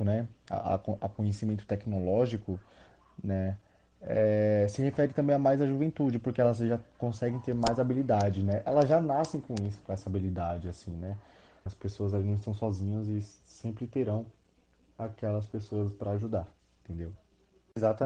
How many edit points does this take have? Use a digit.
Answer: 1